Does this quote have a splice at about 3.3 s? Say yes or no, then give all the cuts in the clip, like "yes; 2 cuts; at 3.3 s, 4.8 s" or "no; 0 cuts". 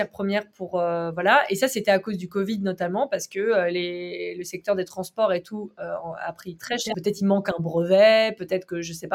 no; 1 cut; at 6.9 s